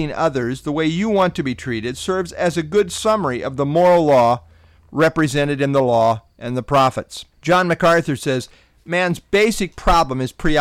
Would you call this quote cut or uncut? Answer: cut